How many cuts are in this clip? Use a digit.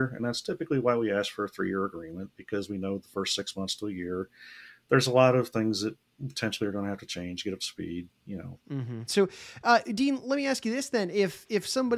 1